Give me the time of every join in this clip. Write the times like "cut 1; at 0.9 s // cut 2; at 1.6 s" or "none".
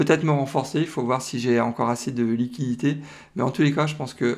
none